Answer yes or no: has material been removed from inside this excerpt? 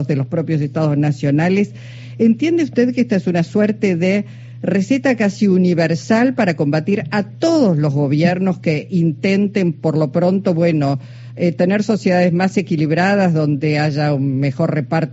no